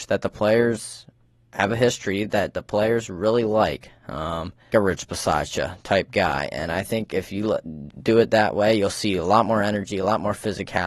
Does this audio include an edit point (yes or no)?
yes